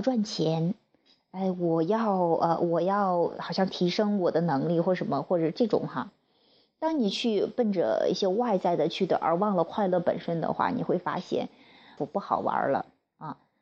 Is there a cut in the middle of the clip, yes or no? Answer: yes